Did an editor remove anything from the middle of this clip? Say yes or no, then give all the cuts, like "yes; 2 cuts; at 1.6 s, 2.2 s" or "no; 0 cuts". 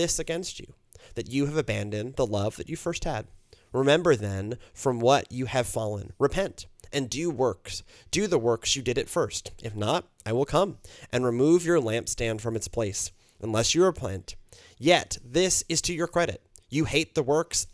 no; 0 cuts